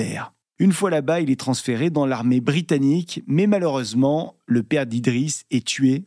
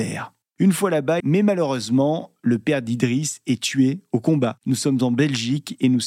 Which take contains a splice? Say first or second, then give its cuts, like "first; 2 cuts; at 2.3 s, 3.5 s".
second; 1 cut; at 1.2 s